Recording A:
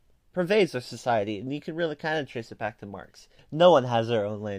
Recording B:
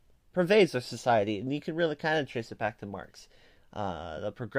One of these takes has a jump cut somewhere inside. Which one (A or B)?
A